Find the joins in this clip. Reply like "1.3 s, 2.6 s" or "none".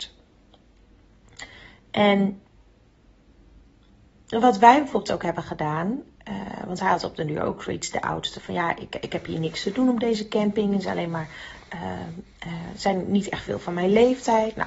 none

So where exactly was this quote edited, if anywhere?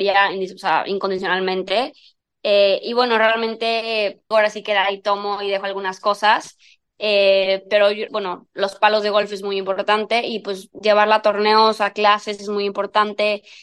4.3 s, 8.1 s

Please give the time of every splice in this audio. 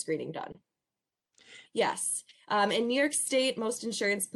1.6 s

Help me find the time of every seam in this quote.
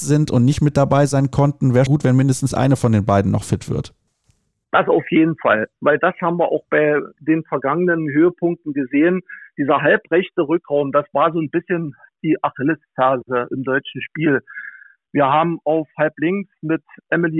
1.9 s

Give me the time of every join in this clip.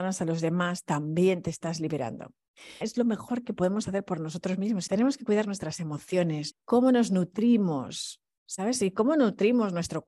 2.8 s, 4.9 s, 6.5 s

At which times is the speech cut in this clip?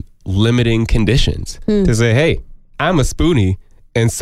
none

